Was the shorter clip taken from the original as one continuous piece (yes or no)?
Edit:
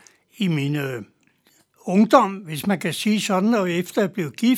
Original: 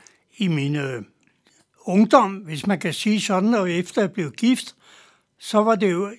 yes